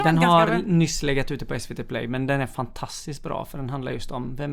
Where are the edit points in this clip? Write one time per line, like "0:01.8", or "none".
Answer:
none